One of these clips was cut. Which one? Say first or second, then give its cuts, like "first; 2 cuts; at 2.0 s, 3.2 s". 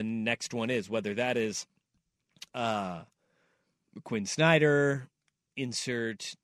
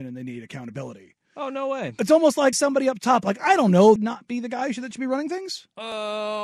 second; 2 cuts; at 2.5 s, 4.0 s